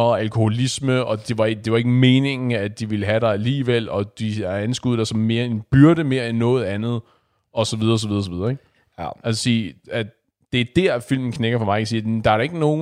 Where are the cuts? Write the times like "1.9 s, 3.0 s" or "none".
none